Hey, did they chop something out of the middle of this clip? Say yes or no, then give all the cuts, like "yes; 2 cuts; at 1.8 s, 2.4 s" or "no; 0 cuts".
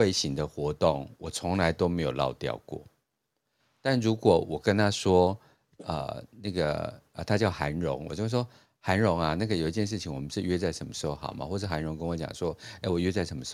no; 0 cuts